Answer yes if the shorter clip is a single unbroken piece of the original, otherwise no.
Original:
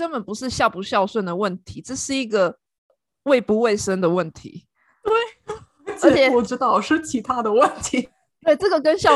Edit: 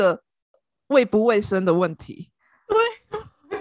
yes